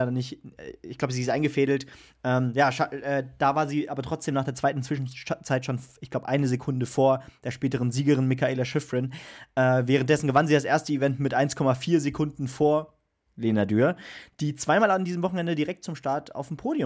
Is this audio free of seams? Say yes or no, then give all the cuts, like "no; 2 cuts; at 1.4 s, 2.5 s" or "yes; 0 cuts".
yes; 0 cuts